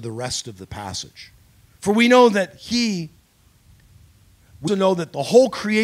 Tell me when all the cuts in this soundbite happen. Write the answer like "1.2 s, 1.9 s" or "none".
1.8 s, 4.7 s